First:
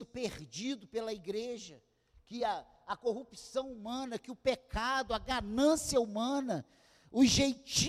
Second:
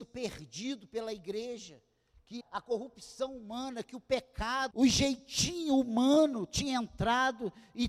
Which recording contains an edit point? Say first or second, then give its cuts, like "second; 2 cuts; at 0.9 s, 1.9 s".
second; 2 cuts; at 2.4 s, 4.7 s